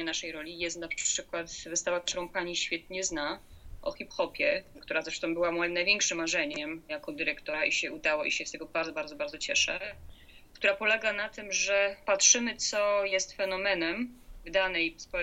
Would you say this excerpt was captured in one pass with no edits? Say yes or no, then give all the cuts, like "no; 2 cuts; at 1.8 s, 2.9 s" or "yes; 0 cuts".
yes; 0 cuts